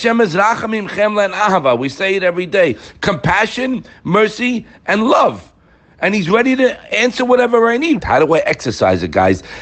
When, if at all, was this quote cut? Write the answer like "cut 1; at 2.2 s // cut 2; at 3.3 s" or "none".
cut 1; at 8.0 s